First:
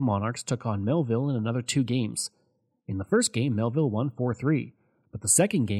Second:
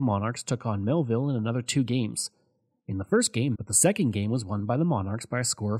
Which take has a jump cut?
second; 1 cut; at 3.5 s

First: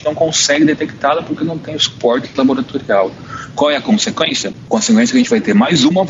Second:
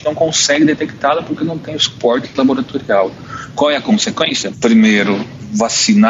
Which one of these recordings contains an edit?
second; 1 cut; at 4.5 s

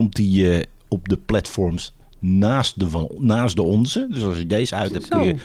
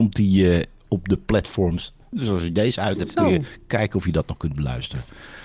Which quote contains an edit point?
second; 1 cut; at 2.1 s

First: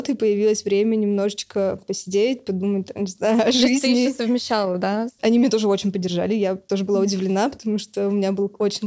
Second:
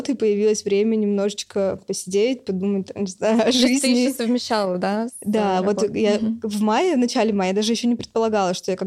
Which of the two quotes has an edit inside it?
first; 1 cut; at 5.2 s

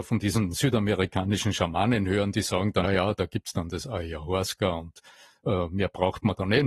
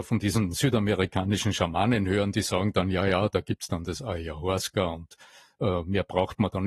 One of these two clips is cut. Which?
first; 1 cut; at 2.8 s

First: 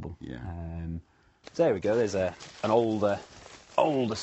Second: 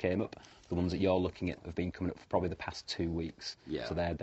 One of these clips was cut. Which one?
second; 1 cut; at 1.6 s

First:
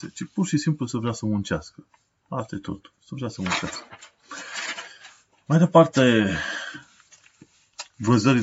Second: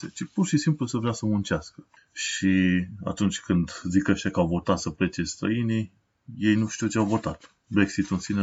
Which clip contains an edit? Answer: second; 1 cut; at 2.0 s

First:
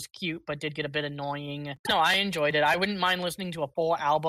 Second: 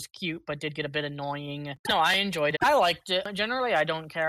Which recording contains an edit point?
second; 1 cut; at 2.5 s

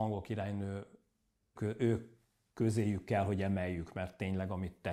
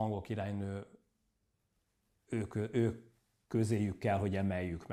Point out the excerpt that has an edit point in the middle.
first; 1 cut; at 1.6 s

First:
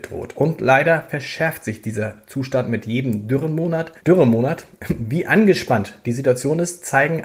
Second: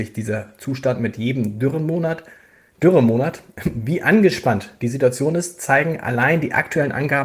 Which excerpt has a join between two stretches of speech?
first; 1 cut; at 4.0 s

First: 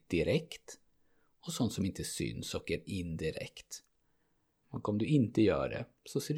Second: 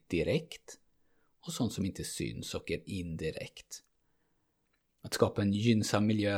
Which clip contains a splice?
first; 1 cut; at 4.6 s

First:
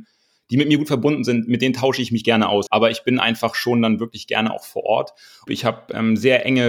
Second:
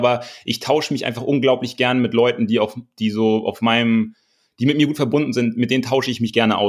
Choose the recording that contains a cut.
first; 2 cuts; at 2.7 s, 5.5 s

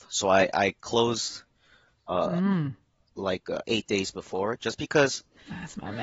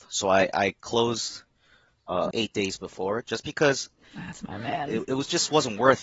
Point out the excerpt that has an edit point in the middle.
second; 1 cut; at 2.3 s

